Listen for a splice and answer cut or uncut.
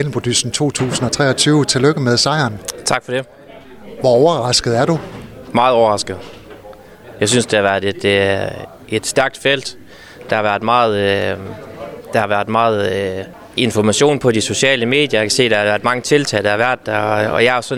cut